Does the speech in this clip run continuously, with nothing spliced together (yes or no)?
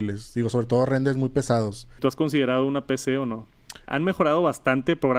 no